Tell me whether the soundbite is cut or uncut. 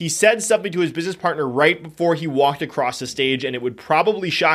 uncut